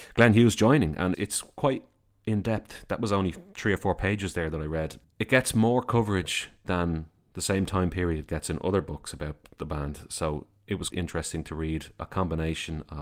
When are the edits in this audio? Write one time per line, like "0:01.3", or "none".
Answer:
0:01.1
0:10.9